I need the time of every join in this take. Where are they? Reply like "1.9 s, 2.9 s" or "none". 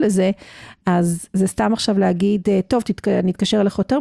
none

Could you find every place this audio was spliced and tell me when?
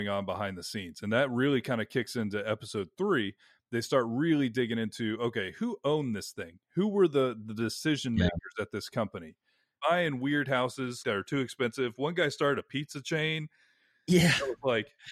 9.8 s, 11.0 s

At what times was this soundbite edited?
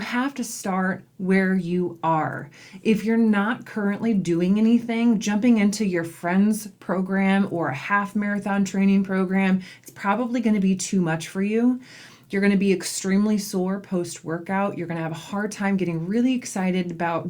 none

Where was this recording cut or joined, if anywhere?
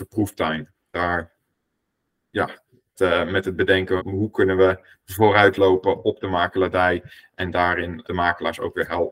2.9 s, 4.0 s, 8.0 s

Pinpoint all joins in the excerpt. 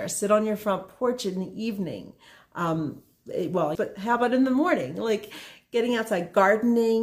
3.8 s

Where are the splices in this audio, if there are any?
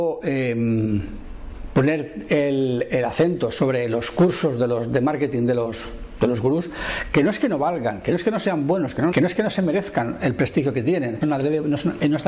9.1 s, 11.2 s

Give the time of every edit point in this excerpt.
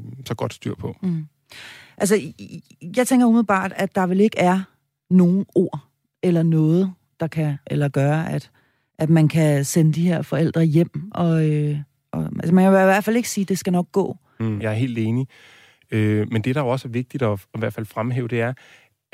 7.6 s, 14.6 s

